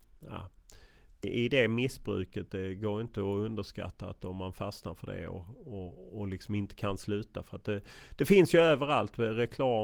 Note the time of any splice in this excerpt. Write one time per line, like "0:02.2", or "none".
0:01.2